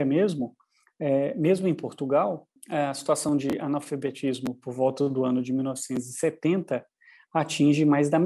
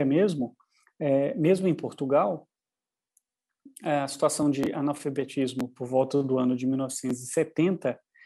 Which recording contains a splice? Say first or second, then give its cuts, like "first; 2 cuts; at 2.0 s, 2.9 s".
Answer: first; 1 cut; at 2.6 s